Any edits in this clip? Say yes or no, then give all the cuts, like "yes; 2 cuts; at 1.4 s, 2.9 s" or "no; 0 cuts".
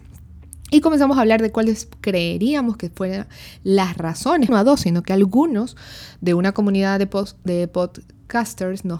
yes; 1 cut; at 4.5 s